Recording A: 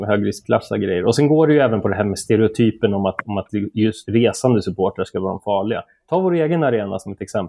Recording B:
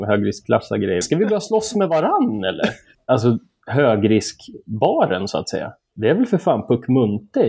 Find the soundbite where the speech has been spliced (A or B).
B